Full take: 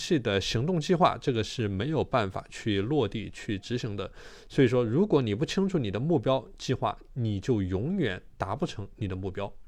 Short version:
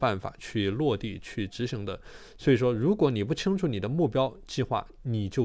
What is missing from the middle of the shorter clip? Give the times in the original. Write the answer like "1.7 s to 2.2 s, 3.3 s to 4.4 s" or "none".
none